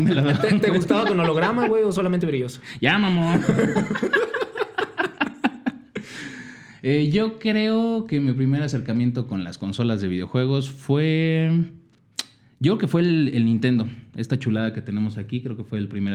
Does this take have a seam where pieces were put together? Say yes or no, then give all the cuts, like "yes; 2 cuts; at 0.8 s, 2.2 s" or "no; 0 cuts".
no; 0 cuts